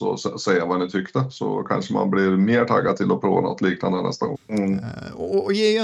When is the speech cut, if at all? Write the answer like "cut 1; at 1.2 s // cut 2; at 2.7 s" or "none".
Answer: cut 1; at 4.3 s